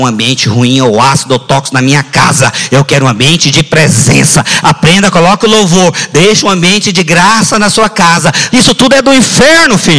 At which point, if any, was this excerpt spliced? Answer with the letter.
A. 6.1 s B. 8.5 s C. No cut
B